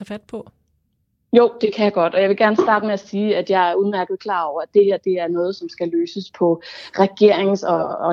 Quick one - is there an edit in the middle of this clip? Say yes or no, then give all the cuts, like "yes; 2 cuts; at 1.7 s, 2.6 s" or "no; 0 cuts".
no; 0 cuts